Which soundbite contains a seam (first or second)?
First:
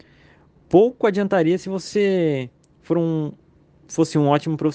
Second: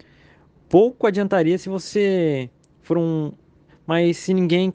second